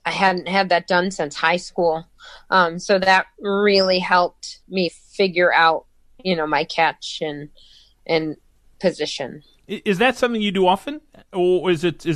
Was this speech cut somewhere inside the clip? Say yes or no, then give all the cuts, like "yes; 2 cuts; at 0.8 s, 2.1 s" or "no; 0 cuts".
no; 0 cuts